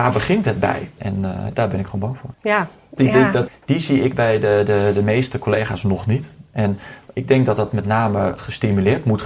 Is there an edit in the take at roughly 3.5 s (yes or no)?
yes